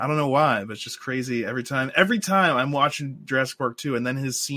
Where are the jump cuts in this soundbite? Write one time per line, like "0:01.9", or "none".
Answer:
none